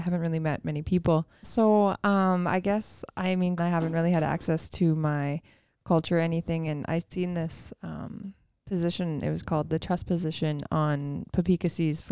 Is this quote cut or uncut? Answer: cut